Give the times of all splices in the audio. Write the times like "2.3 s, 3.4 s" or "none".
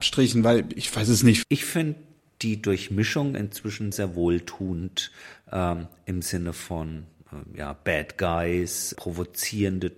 1.4 s, 3.9 s, 8.9 s